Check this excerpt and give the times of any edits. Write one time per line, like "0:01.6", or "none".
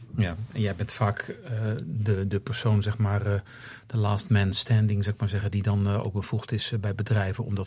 none